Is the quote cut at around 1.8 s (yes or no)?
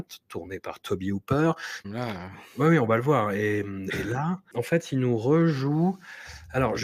yes